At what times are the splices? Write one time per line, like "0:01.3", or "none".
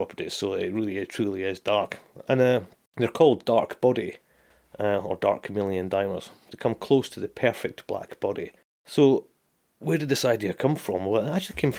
none